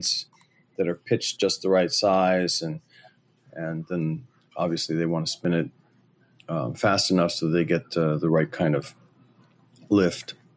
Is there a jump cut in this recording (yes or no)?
no